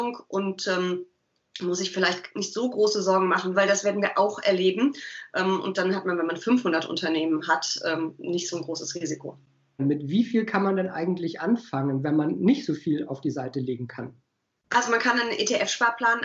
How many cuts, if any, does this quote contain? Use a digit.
2